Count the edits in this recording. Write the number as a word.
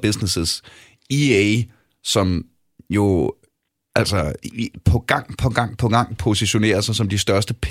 zero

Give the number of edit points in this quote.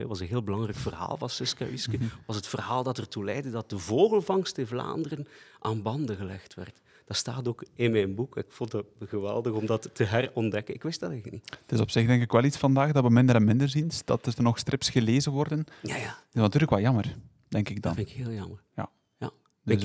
zero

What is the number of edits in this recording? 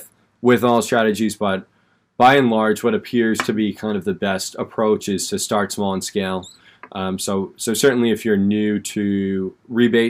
zero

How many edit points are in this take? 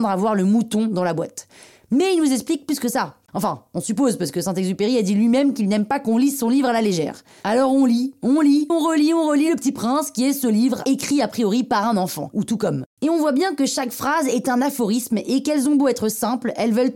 one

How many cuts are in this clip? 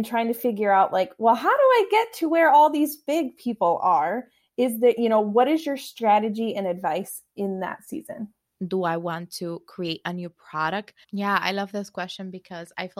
two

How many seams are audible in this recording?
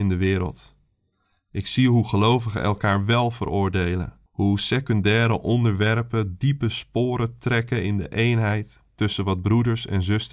one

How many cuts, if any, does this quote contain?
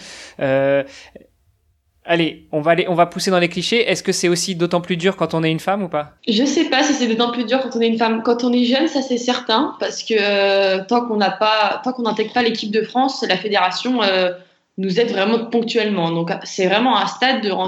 one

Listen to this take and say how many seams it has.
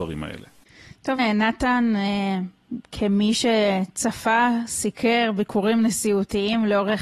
one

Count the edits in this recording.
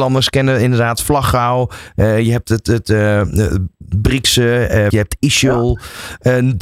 one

